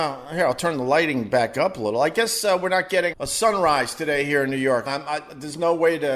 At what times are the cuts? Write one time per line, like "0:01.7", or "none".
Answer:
0:03.1
0:04.9